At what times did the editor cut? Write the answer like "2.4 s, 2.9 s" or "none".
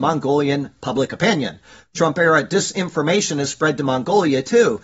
none